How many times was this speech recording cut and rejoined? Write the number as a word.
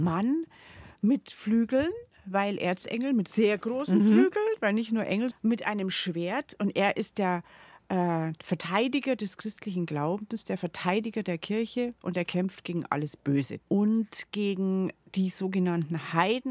two